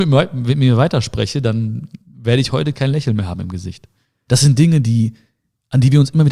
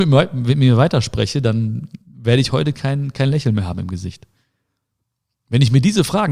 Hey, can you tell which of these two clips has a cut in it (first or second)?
first